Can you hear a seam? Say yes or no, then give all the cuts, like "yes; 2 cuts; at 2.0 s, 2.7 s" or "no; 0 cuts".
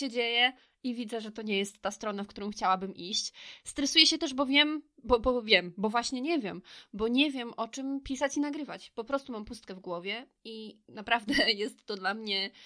no; 0 cuts